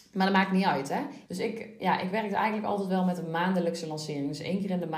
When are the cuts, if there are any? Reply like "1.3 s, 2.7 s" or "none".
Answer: 1.3 s